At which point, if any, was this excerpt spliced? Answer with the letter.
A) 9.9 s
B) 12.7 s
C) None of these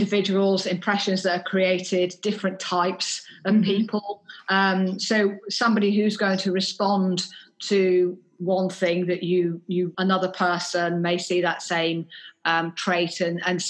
A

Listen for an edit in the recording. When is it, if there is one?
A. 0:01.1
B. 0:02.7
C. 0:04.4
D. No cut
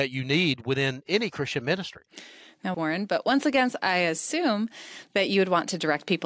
B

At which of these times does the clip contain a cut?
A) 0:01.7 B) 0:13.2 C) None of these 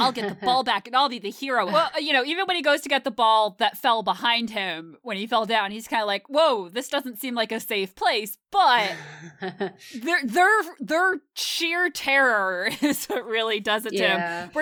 A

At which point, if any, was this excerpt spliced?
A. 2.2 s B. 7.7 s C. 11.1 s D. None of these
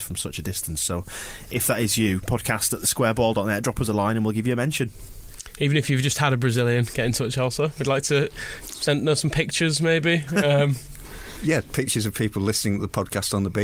D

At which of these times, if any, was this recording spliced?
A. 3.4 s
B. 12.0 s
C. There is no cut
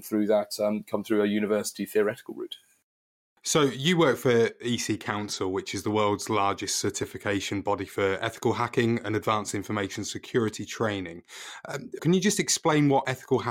B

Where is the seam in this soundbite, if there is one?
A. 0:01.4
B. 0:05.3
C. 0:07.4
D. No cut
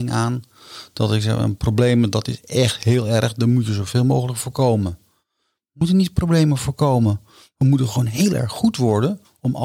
D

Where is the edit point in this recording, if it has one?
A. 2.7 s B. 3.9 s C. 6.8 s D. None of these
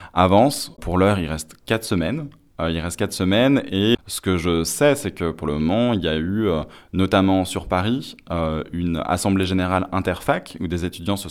B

